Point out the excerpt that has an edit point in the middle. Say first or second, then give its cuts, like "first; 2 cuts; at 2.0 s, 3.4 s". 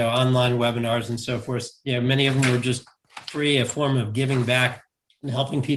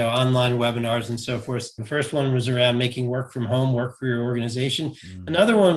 second; 1 cut; at 1.8 s